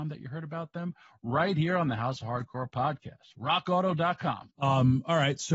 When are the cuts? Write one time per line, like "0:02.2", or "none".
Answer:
0:04.5